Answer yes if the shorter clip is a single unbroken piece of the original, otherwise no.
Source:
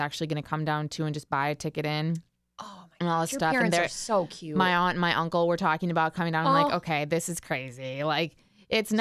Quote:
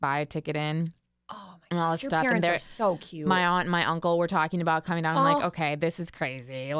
yes